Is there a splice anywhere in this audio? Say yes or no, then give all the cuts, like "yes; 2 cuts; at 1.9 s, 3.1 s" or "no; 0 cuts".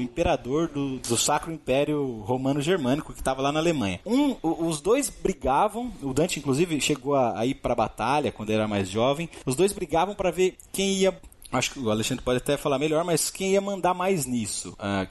yes; 1 cut; at 1.0 s